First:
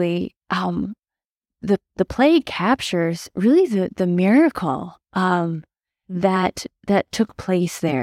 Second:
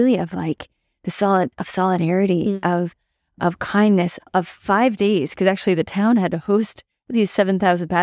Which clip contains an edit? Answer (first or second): second